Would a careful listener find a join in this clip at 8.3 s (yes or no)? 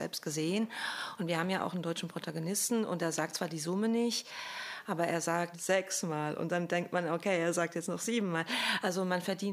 no